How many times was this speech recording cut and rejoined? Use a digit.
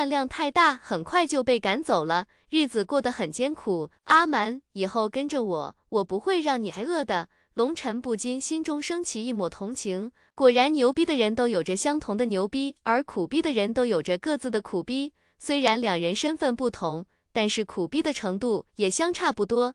0